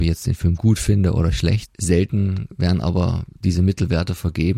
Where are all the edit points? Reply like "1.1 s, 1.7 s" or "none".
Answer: 1.7 s